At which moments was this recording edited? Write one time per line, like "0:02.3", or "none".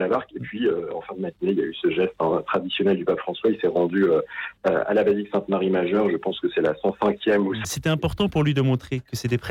0:07.6